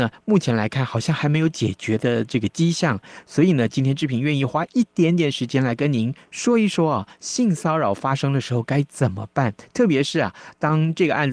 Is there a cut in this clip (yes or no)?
no